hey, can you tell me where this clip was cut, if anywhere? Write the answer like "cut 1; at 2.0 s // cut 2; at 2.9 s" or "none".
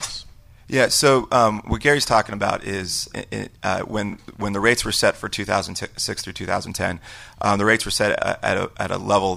cut 1; at 3.1 s // cut 2; at 8.2 s